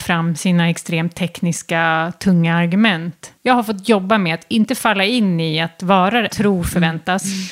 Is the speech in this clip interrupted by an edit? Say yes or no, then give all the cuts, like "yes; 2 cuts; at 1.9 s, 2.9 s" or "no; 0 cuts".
yes; 2 cuts; at 3.4 s, 6.3 s